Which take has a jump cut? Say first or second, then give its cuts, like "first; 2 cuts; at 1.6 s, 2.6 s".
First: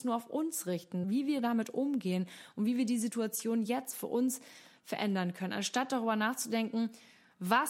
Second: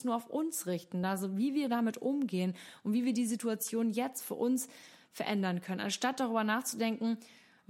first; 1 cut; at 1.0 s